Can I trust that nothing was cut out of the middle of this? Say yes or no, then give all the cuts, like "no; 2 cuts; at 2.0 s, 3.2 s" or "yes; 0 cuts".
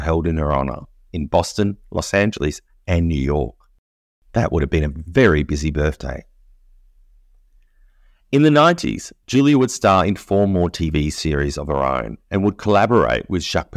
yes; 0 cuts